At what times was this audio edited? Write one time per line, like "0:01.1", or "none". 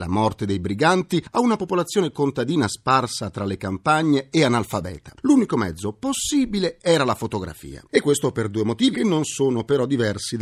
0:07.9
0:08.9